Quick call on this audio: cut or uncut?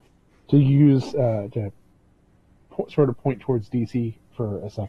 uncut